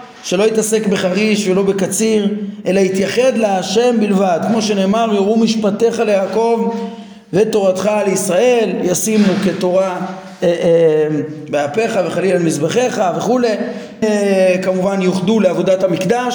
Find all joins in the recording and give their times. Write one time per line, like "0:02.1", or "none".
0:14.0

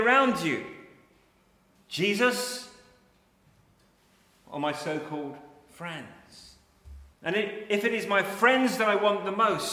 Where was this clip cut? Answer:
0:01.8
0:07.1

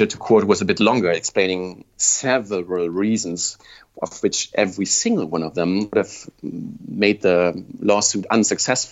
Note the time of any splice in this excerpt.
none

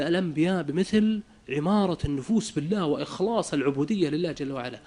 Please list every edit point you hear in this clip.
none

